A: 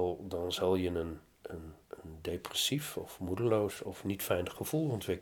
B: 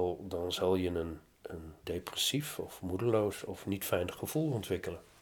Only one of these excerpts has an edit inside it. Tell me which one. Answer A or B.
B